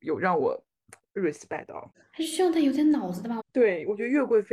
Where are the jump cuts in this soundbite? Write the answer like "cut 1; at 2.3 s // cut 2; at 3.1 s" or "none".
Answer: cut 1; at 3.4 s